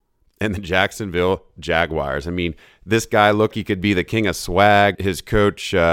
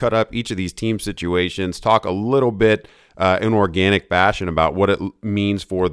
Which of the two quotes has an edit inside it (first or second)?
first